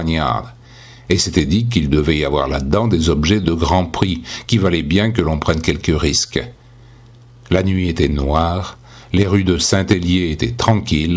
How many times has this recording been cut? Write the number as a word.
zero